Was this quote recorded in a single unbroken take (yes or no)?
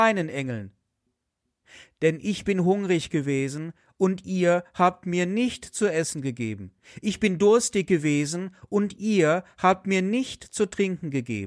yes